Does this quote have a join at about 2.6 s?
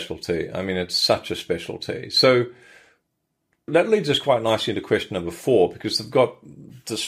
no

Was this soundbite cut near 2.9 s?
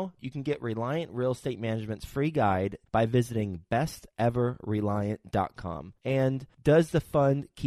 yes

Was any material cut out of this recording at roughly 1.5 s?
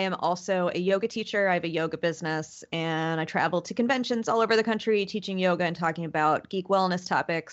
no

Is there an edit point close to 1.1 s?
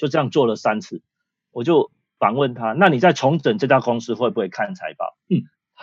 no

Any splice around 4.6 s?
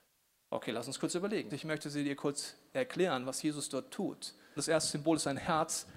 yes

